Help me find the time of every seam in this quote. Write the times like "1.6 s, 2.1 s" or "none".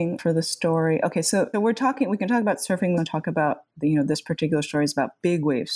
1.5 s, 3.0 s